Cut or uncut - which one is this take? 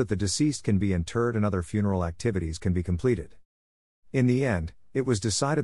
cut